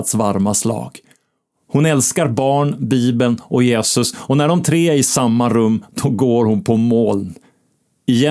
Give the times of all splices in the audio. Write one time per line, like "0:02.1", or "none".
none